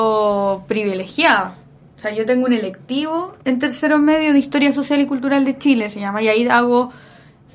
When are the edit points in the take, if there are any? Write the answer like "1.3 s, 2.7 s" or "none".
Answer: 3.4 s